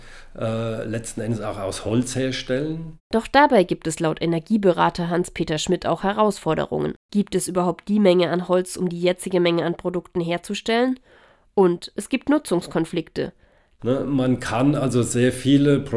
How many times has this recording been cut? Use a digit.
1